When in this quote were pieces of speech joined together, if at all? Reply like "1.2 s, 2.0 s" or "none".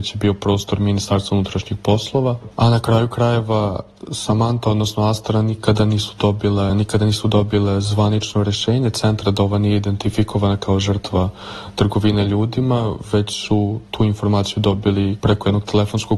2.5 s, 6.7 s